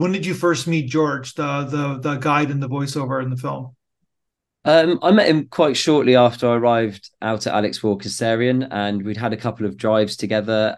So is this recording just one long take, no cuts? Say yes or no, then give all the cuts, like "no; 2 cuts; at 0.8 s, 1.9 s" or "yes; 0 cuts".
yes; 0 cuts